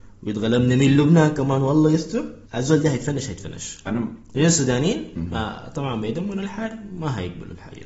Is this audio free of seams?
no; 1 cut; at 2.4 s

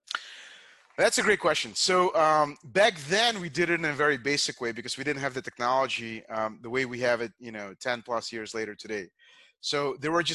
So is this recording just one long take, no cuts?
yes; 0 cuts

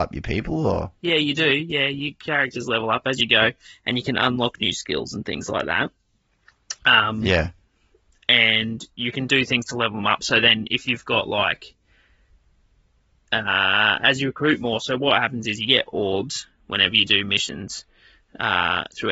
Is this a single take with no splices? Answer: yes; 0 cuts

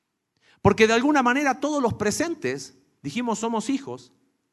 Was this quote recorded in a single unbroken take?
yes; 0 cuts

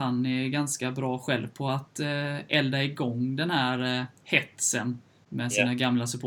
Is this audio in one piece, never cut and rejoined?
yes; 0 cuts

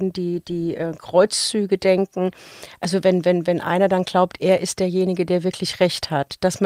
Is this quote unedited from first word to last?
yes; 0 cuts

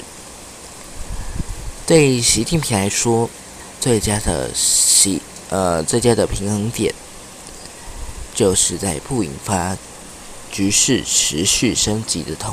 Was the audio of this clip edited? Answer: no; 0 cuts

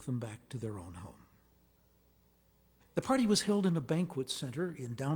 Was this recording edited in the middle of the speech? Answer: yes; 1 cut; at 2.8 s

